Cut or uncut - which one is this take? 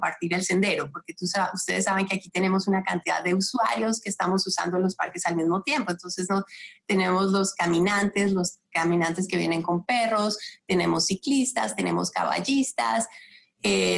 uncut